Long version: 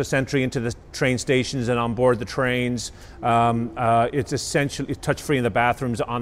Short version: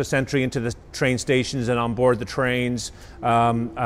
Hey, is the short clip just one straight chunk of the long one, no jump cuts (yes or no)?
yes